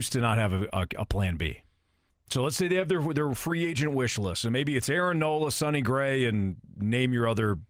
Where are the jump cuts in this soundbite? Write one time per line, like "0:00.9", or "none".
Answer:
0:02.1

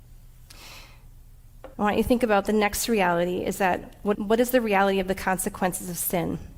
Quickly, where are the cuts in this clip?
0:01.7
0:04.1

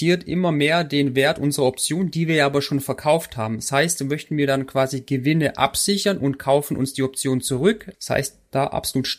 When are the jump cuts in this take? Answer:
0:07.9

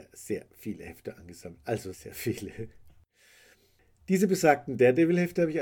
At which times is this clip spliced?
0:01.9

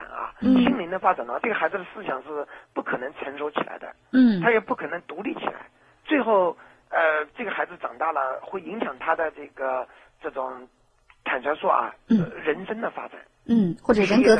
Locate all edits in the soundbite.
none

